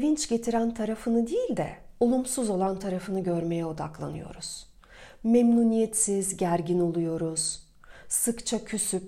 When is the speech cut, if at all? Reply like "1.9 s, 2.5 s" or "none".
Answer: none